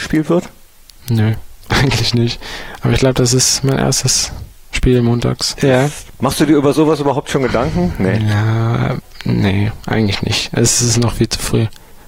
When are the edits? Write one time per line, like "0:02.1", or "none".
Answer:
0:05.6